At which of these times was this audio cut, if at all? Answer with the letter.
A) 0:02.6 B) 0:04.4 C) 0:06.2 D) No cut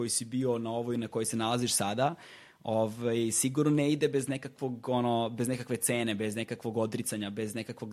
D